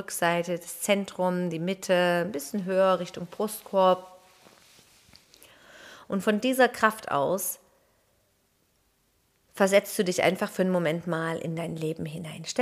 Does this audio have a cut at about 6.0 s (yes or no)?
yes